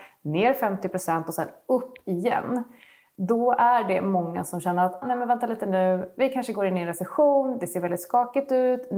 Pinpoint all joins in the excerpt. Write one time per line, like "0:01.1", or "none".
0:05.0

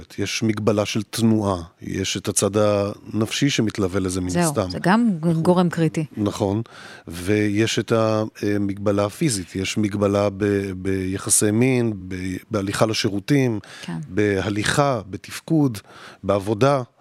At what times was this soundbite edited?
0:12.0

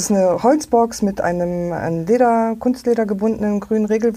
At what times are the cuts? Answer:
none

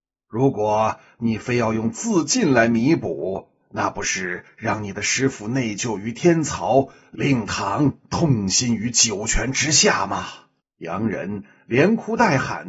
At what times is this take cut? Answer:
0:10.6

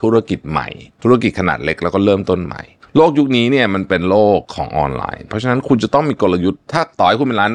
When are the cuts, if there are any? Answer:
0:04.5

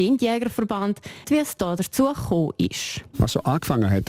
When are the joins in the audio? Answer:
0:01.2

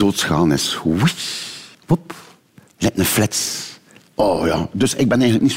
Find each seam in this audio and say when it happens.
0:01.7
0:04.0

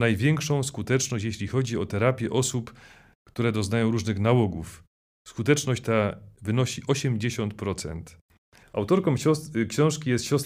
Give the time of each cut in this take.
0:08.6

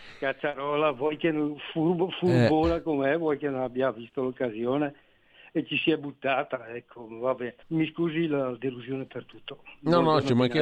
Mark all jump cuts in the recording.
0:07.6

